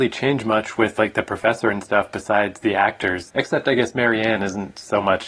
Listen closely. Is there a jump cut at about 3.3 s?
yes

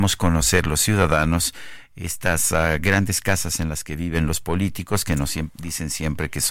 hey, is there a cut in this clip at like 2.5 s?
no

